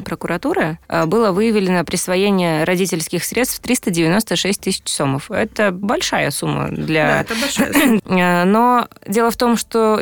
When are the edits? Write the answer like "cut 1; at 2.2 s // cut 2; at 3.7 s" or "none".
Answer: cut 1; at 5.8 s // cut 2; at 8.0 s